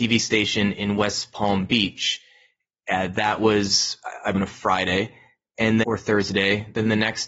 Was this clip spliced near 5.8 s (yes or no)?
yes